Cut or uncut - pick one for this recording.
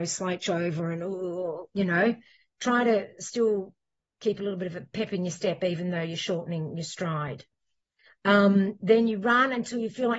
uncut